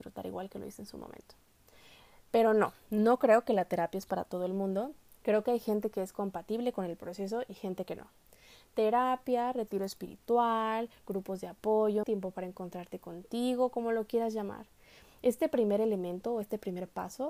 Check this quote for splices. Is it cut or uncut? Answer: cut